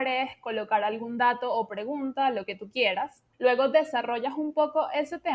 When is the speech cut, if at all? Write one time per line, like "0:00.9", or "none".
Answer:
0:03.3